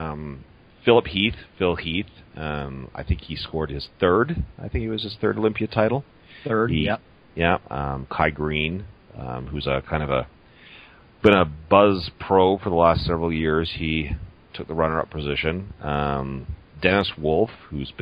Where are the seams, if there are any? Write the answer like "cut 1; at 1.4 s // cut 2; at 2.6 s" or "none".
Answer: none